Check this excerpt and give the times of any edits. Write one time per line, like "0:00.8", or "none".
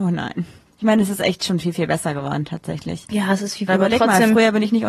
0:03.7